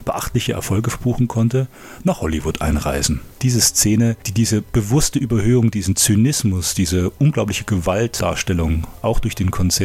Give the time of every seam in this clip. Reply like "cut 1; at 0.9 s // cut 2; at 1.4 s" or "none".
cut 1; at 3.4 s